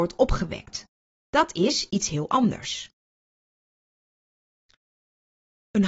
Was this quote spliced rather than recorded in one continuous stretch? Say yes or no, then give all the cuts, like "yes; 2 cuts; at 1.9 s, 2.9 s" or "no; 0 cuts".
no; 0 cuts